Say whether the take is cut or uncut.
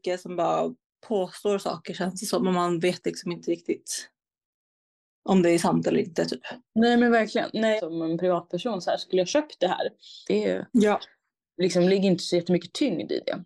cut